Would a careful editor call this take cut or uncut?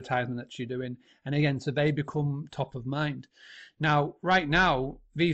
uncut